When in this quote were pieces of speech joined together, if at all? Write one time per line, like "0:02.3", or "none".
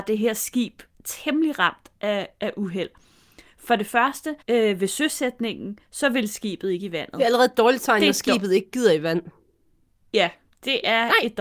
0:04.4